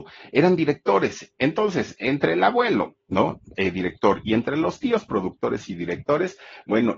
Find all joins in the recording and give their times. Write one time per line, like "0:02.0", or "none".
none